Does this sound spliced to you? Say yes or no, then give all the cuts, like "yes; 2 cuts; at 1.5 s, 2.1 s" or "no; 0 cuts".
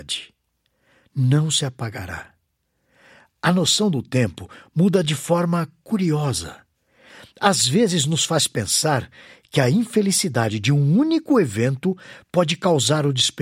no; 0 cuts